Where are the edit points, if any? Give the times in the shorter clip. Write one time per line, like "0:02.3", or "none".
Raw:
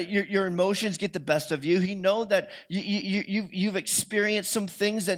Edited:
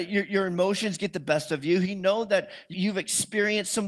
0:02.7